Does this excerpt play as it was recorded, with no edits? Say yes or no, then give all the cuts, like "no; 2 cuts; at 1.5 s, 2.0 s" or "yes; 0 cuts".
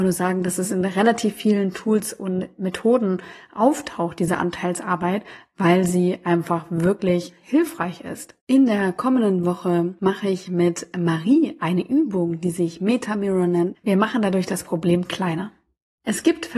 no; 2 cuts; at 8.4 s, 13.7 s